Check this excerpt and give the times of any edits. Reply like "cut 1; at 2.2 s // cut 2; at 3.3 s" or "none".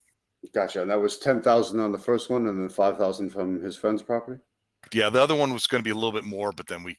none